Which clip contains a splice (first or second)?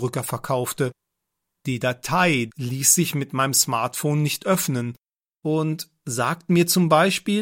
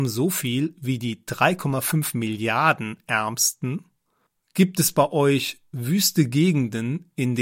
first